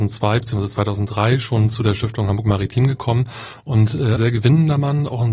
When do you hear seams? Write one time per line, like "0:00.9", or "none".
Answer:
0:04.2